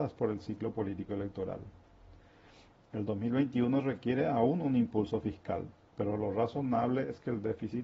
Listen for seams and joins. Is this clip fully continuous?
no; 1 cut; at 5.9 s

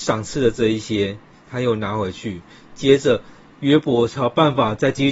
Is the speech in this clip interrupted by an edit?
no; 0 cuts

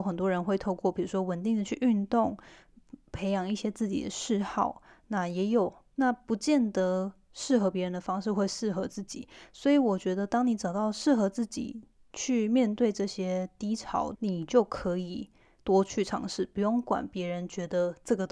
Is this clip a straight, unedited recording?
no; 2 cuts; at 6.0 s, 14.1 s

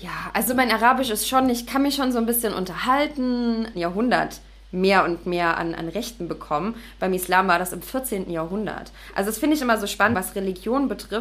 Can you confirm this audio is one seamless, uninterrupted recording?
no; 2 cuts; at 3.7 s, 10.1 s

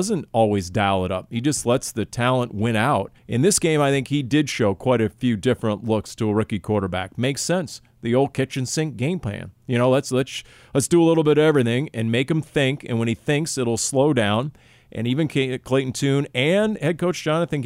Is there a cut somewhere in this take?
yes; 1 cut; at 3.2 s

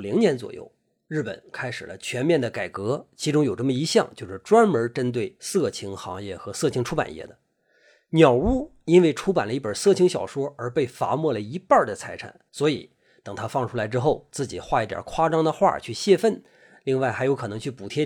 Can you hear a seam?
yes; 1 cut; at 12.5 s

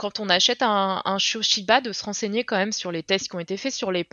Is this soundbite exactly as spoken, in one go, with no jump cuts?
yes; 0 cuts

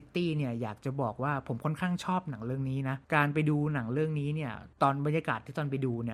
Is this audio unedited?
no; 2 cuts; at 3.0 s, 4.7 s

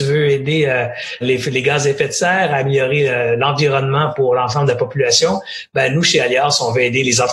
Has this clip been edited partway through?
yes; 1 cut; at 1.2 s

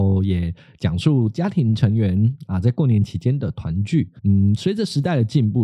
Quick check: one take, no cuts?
no; 1 cut; at 4.2 s

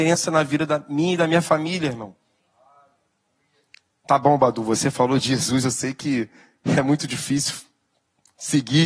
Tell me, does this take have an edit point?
no; 0 cuts

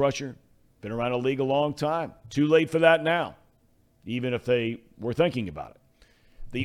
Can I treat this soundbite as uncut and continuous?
yes; 0 cuts

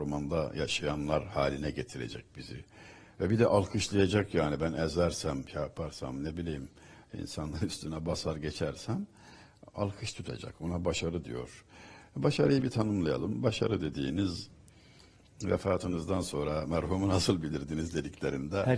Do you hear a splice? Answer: no; 0 cuts

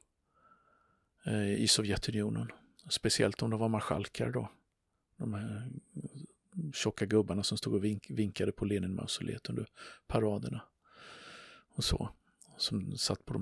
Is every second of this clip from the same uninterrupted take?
yes; 0 cuts

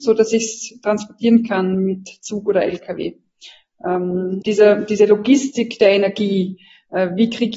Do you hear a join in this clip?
yes; 1 cut; at 4.4 s

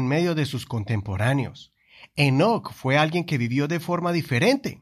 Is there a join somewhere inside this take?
no; 0 cuts

